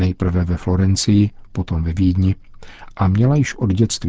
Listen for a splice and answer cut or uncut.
uncut